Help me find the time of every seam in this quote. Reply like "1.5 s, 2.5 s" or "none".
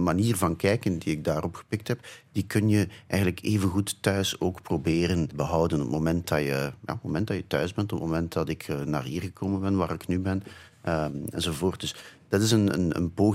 5.3 s